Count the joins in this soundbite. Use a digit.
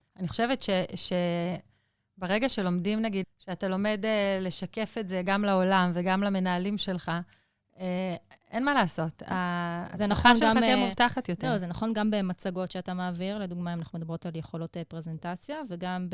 1